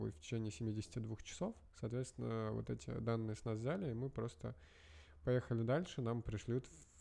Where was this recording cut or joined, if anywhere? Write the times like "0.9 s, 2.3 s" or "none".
none